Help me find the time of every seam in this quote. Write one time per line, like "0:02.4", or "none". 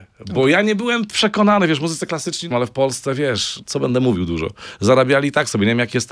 0:02.5
0:03.6